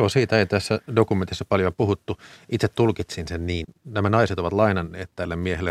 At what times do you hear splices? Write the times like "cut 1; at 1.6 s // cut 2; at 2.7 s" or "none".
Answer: cut 1; at 3.6 s